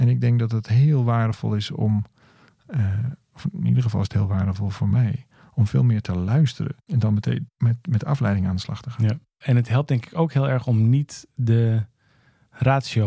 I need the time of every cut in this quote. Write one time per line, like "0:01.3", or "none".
none